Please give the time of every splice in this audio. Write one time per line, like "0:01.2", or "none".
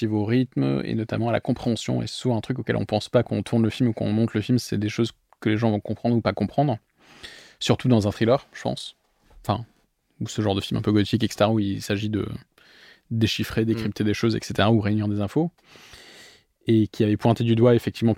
none